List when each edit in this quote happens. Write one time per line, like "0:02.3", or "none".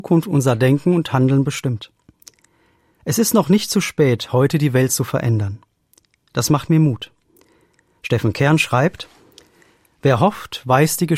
none